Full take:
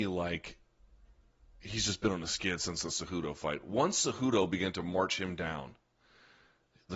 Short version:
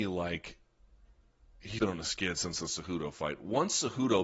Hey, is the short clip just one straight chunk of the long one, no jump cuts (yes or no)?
no